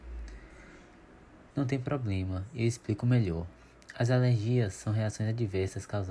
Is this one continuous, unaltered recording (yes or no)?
no